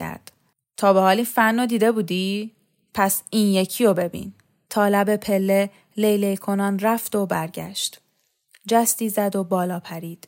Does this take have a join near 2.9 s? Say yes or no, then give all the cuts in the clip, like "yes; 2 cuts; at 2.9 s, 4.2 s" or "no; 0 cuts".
no; 2 cuts; at 4.6 s, 8.5 s